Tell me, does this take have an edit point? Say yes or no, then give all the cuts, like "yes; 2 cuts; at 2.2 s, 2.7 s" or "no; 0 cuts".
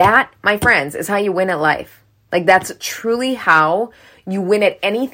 no; 0 cuts